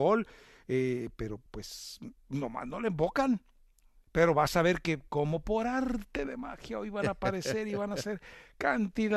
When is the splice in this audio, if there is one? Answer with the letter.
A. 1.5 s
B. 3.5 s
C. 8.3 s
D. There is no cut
D